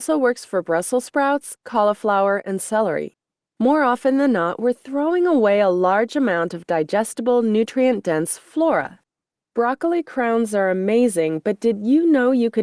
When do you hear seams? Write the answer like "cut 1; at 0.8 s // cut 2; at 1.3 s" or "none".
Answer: cut 1; at 3.4 s